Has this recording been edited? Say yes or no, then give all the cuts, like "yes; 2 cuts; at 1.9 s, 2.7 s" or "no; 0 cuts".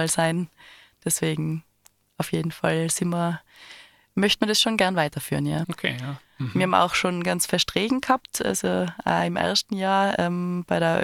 yes; 1 cut; at 5.6 s